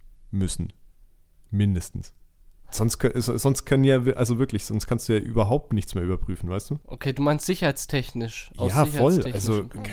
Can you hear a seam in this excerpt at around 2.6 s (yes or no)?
yes